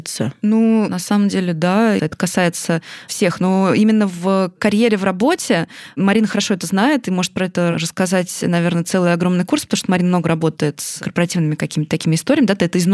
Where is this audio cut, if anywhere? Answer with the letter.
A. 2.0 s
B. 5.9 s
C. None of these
A